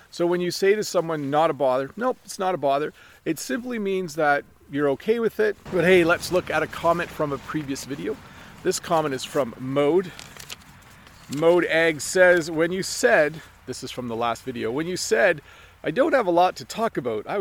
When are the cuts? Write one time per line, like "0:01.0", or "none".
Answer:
0:05.7